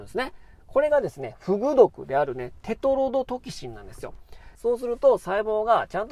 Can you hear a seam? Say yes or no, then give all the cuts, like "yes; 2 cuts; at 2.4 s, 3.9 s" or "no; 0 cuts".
yes; 1 cut; at 4.5 s